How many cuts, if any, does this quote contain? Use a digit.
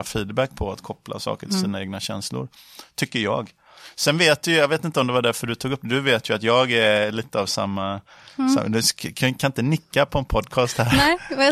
0